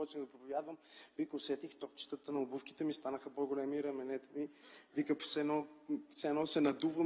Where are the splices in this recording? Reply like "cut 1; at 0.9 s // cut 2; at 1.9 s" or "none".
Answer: cut 1; at 5.2 s